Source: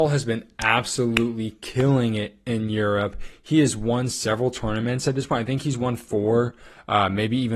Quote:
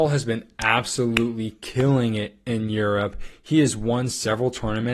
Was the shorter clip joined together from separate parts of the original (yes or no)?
no